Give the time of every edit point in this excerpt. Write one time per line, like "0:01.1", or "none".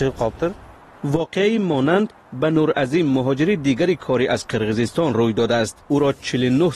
0:05.8